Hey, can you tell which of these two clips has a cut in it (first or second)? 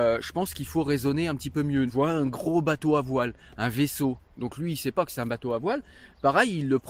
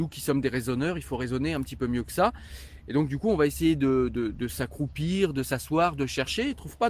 first